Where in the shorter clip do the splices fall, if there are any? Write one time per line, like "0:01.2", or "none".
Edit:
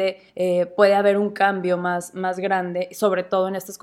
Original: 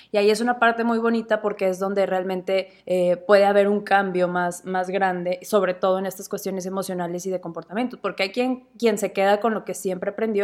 none